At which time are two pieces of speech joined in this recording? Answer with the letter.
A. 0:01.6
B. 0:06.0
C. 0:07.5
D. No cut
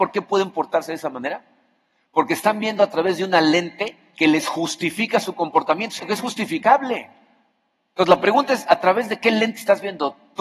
B